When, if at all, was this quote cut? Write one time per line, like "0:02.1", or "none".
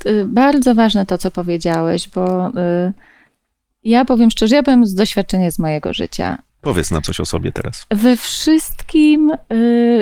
0:06.5